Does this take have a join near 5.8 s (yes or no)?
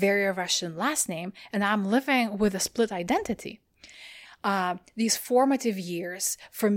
no